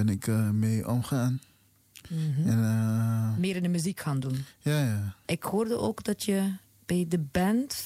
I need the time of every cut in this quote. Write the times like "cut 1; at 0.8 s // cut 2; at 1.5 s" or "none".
cut 1; at 5.2 s